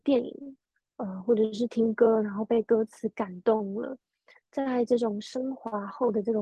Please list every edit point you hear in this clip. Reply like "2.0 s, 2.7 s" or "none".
none